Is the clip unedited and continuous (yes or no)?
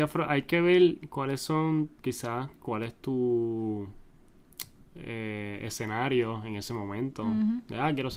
no